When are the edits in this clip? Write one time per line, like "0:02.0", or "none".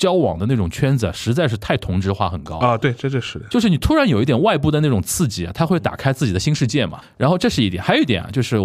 0:07.0